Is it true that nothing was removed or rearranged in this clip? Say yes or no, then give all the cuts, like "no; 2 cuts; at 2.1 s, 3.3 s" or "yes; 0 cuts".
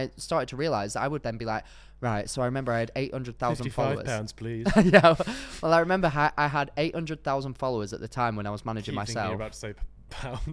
yes; 0 cuts